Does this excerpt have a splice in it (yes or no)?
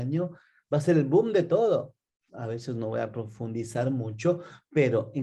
yes